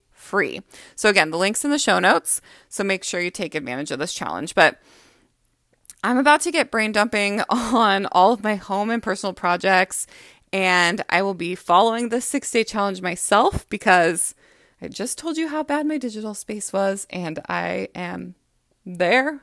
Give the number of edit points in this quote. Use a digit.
0